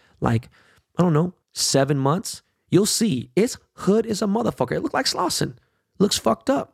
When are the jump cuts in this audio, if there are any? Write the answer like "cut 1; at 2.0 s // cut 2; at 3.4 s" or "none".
cut 1; at 1.4 s